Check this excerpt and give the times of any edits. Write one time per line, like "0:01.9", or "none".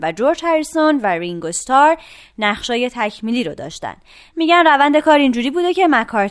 none

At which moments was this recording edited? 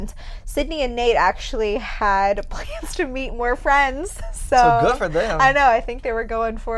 none

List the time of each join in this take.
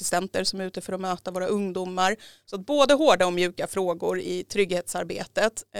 none

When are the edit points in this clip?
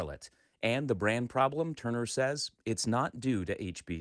none

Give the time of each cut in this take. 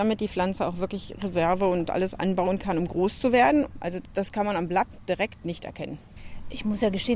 0:03.7

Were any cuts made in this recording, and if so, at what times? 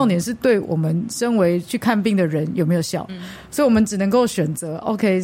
0:03.1

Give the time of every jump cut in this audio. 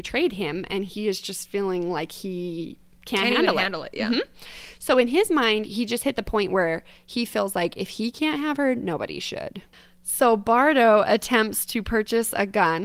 none

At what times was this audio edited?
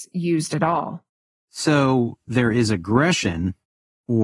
0:01.4

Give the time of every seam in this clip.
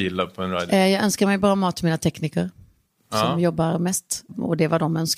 none

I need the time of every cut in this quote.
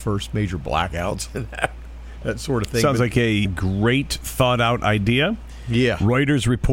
0:03.5

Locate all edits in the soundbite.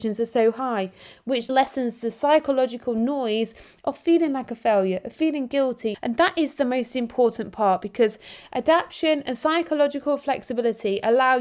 0:01.5
0:05.9

